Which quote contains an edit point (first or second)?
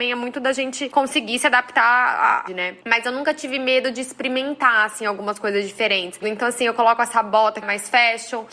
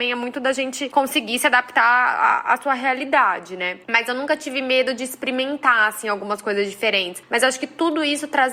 first